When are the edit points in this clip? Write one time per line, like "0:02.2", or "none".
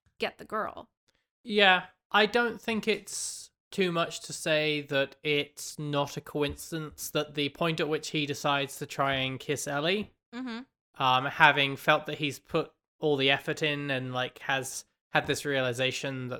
none